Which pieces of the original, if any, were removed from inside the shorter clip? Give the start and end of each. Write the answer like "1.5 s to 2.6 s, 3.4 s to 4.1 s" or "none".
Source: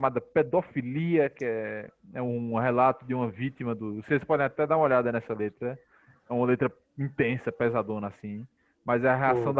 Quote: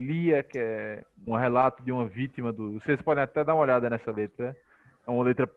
2.1 s to 2.5 s